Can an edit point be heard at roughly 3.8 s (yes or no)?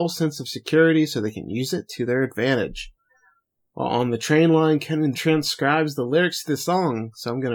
no